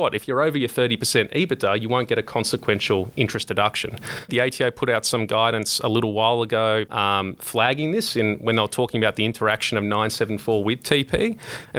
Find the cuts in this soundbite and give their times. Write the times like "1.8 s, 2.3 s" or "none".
4.3 s, 6.9 s